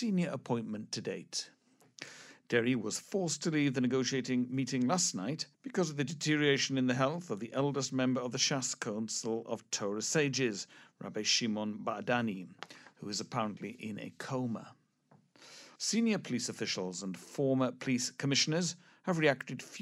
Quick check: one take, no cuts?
no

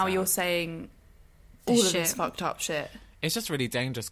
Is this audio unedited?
yes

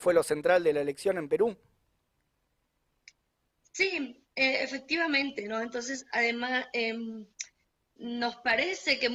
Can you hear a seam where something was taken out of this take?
no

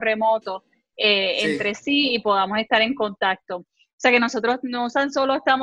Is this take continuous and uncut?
yes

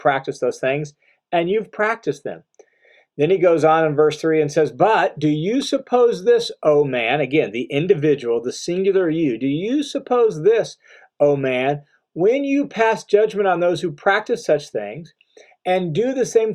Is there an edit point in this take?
no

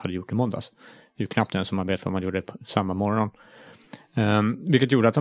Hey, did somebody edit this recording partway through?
no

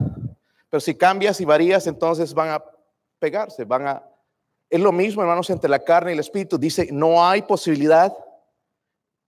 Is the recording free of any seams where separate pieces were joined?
yes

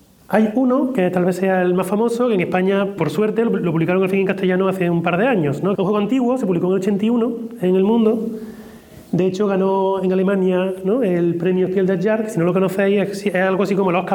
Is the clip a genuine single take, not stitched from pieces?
no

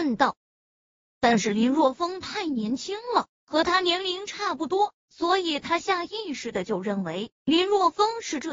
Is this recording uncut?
no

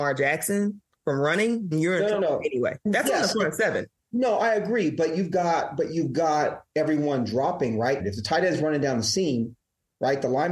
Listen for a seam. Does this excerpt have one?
yes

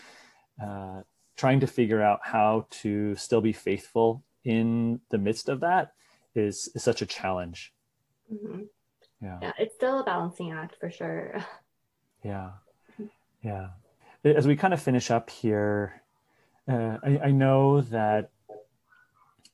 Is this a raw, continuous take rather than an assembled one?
yes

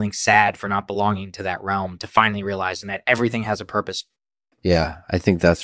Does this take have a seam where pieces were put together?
no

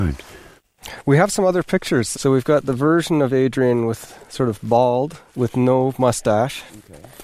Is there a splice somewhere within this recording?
yes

